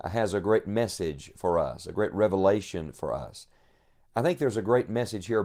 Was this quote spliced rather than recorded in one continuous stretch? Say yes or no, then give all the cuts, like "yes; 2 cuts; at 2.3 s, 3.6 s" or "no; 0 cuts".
no; 0 cuts